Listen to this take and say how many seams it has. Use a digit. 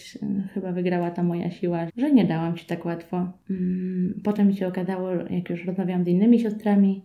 1